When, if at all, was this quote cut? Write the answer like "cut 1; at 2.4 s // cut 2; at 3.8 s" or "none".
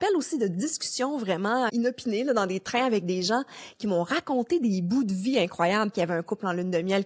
cut 1; at 1.7 s // cut 2; at 5.9 s